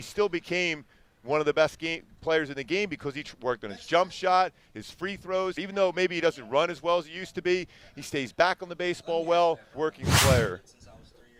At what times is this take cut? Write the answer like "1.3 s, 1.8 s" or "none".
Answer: 5.6 s, 9.7 s